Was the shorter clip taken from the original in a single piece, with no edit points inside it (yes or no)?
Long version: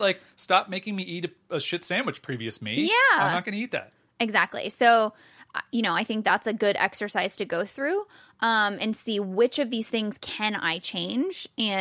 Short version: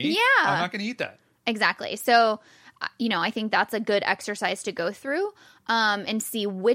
yes